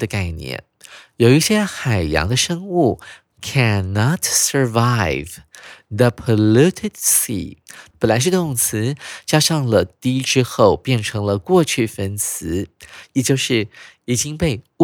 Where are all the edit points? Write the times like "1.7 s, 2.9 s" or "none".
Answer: 7.9 s, 13.1 s